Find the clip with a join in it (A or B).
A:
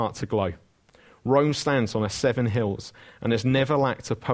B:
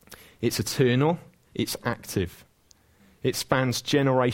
B